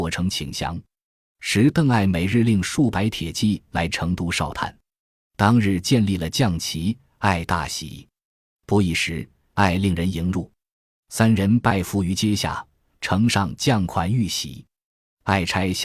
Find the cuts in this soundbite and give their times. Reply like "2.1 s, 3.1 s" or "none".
9.5 s